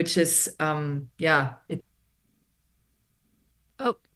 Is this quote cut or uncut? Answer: uncut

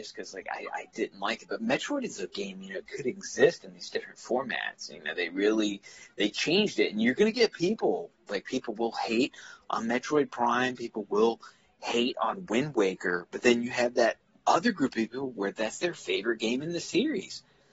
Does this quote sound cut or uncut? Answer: uncut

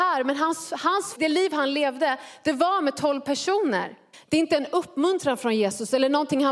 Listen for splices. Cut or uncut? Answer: cut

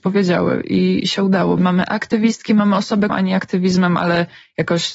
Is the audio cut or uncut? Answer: cut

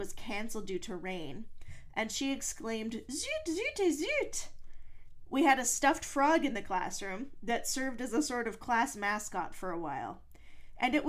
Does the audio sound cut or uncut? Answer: cut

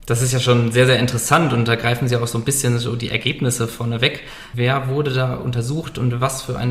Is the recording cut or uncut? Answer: cut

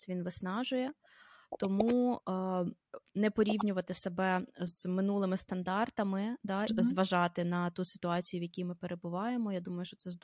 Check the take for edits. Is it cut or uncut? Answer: cut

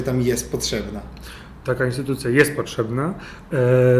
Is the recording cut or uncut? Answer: uncut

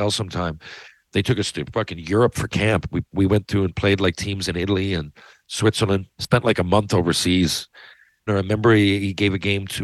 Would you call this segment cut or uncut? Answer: cut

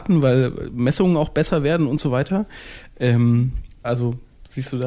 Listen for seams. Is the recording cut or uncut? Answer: cut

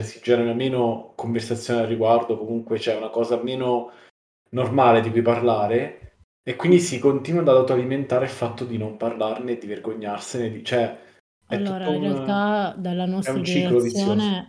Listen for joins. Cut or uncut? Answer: uncut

